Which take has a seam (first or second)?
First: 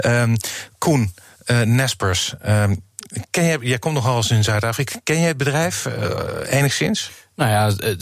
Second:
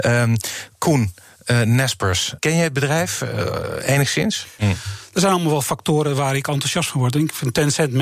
second